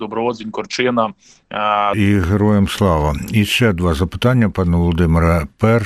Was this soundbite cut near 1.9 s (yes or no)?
yes